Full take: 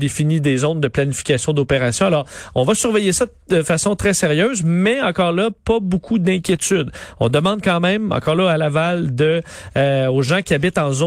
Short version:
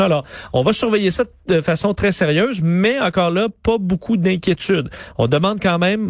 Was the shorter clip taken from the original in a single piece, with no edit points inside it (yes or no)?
yes